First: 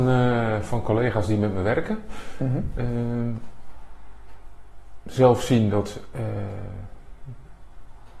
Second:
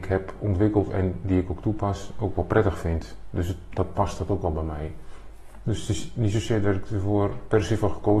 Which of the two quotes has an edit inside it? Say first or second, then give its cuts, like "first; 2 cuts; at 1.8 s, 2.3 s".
second; 1 cut; at 5.6 s